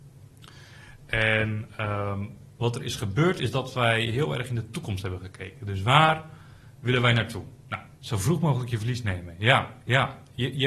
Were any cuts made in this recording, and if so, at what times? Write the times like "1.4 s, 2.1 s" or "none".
8.0 s